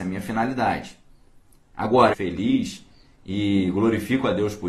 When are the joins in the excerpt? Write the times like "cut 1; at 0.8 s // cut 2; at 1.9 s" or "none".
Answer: cut 1; at 2.1 s